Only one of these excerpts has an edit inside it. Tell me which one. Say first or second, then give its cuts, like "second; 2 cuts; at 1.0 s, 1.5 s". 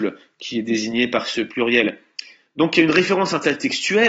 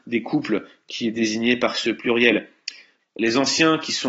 second; 1 cut; at 3.0 s